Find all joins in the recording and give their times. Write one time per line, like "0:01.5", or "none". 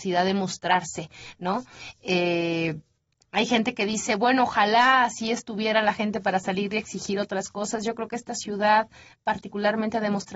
none